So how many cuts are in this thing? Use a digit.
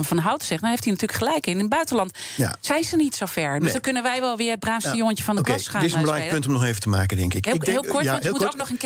0